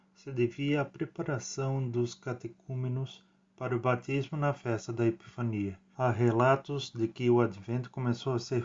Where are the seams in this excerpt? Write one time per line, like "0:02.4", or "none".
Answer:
0:05.9